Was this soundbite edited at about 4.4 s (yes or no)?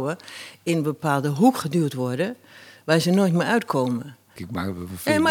yes